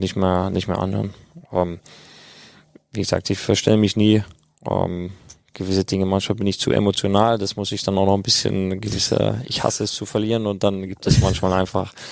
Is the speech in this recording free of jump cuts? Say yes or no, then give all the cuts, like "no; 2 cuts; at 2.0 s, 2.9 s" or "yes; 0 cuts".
yes; 0 cuts